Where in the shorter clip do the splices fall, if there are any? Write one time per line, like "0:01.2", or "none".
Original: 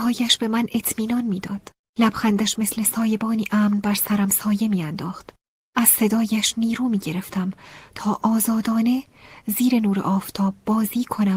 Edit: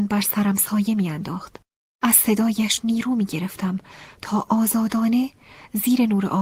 none